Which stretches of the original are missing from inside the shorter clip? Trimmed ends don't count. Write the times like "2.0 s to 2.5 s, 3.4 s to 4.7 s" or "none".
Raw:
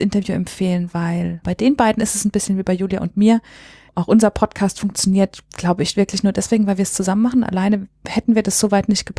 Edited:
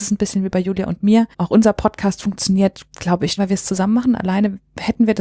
3.5 s to 3.9 s, 5.9 s to 6.7 s